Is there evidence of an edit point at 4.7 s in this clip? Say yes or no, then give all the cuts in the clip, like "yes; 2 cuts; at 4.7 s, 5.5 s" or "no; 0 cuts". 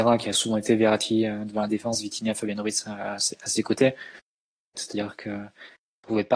yes; 1 cut; at 4.7 s